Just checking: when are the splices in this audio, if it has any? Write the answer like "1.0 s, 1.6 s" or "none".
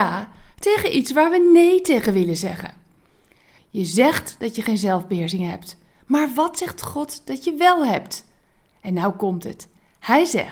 3.6 s